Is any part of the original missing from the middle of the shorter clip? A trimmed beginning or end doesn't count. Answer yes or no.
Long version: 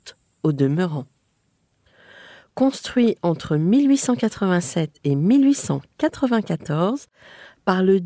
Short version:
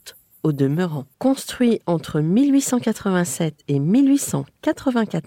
yes